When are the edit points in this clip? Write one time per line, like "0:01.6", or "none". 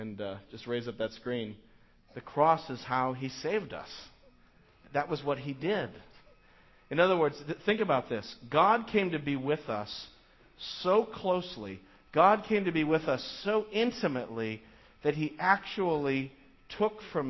0:02.0